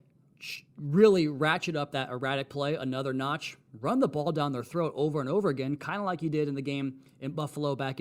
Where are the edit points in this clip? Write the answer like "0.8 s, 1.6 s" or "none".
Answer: none